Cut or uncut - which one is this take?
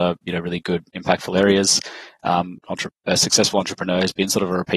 cut